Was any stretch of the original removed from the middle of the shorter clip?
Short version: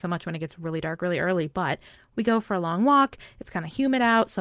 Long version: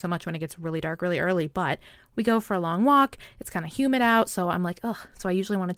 no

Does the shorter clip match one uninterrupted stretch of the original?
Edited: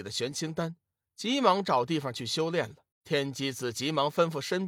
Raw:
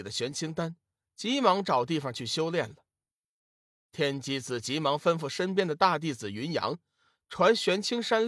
no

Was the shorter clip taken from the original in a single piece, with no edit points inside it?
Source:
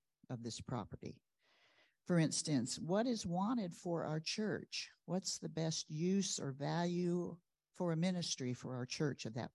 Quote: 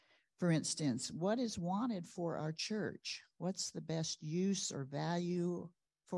yes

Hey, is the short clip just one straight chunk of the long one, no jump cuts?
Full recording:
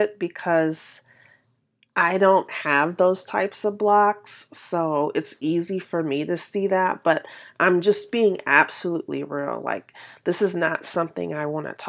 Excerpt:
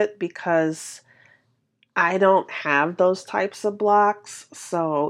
yes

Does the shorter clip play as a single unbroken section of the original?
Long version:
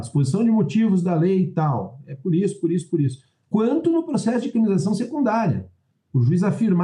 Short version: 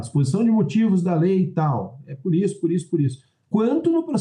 yes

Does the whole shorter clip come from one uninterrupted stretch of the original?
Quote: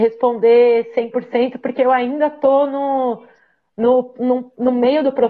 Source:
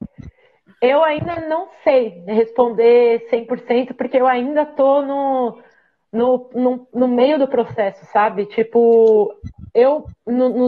yes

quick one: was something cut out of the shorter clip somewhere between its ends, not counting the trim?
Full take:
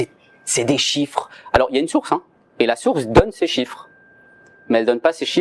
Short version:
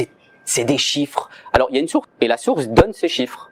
yes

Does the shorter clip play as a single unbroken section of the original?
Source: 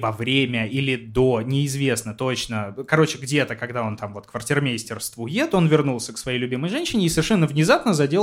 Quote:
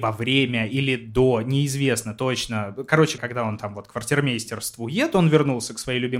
no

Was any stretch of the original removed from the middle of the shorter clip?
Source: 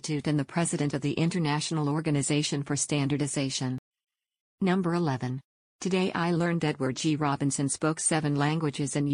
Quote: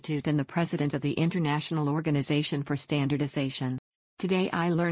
yes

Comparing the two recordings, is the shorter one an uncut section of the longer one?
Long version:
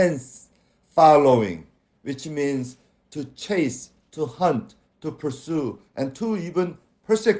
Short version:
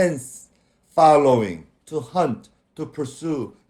no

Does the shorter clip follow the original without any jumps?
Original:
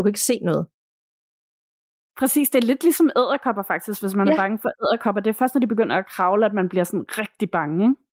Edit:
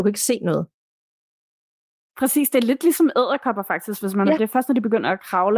no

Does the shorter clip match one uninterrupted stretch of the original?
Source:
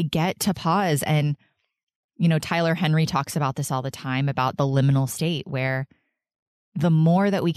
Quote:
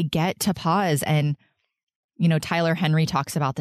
yes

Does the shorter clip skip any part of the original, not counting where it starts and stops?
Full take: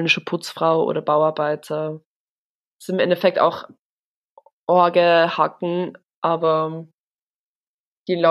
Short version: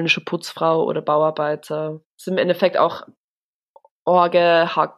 yes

